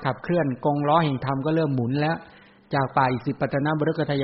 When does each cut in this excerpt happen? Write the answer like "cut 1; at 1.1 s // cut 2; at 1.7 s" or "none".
none